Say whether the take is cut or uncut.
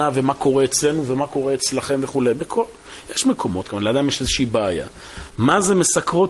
cut